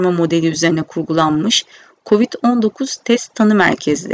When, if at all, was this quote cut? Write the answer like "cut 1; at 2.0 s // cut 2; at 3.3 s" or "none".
none